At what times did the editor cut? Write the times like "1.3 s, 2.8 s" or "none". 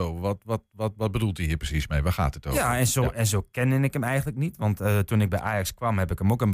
none